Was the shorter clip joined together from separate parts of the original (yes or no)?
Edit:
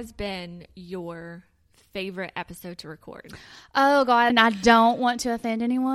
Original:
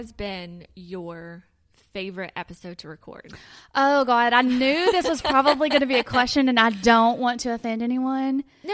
yes